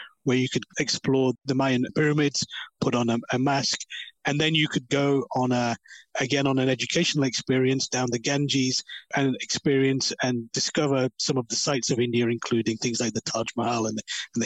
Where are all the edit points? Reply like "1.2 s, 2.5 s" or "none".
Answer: 4.1 s